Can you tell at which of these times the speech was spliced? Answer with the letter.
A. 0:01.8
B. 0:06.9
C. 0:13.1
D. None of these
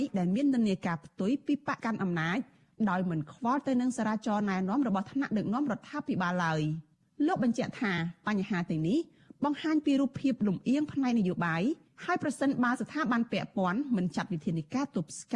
A